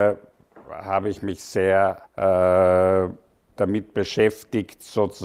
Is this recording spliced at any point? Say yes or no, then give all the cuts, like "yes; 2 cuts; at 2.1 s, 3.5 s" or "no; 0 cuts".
yes; 1 cut; at 2.1 s